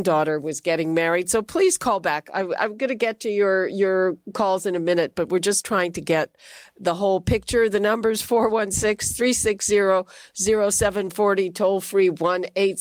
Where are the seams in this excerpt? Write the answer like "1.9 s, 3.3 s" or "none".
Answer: none